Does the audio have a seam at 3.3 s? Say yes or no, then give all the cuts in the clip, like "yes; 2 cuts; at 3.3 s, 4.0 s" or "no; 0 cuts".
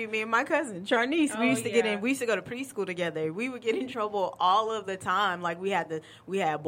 no; 0 cuts